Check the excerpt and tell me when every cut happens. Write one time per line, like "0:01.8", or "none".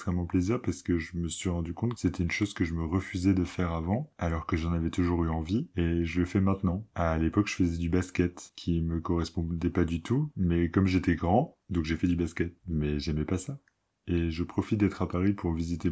0:10.3
0:11.6